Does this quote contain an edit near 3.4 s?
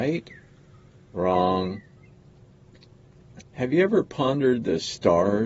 yes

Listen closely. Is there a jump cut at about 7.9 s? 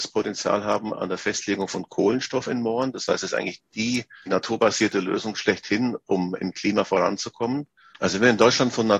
yes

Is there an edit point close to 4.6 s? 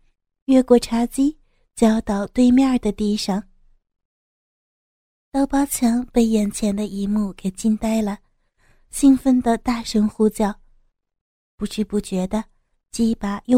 no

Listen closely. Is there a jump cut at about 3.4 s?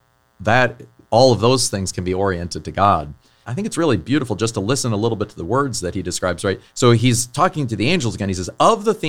yes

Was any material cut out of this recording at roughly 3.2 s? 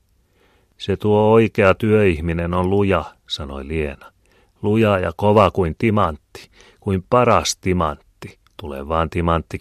no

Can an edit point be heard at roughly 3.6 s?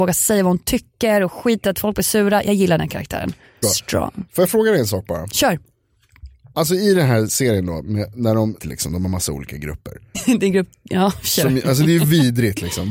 yes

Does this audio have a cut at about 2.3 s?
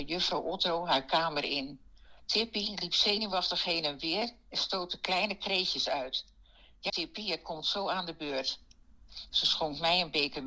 no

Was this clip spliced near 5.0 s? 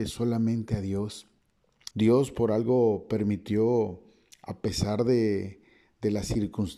no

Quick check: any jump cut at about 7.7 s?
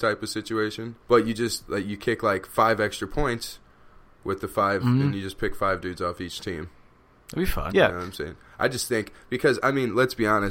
yes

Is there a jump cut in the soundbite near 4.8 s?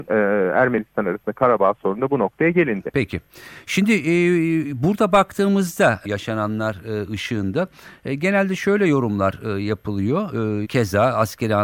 no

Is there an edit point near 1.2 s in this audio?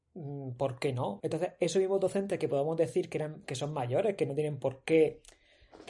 yes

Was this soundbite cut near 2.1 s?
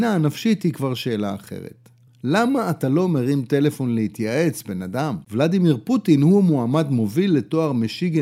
yes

